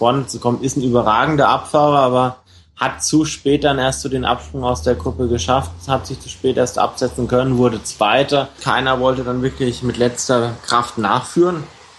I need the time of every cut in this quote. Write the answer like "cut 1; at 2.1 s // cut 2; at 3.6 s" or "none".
cut 1; at 8.6 s